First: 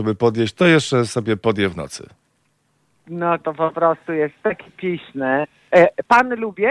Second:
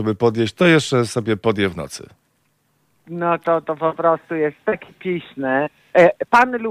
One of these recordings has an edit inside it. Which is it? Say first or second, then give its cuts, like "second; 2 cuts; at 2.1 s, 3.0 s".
first; 1 cut; at 3.4 s